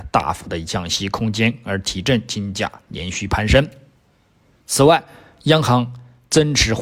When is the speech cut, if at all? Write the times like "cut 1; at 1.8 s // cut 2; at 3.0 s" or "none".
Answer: none